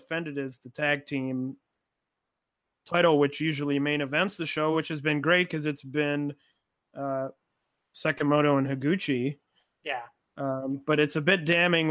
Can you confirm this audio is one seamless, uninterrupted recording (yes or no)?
yes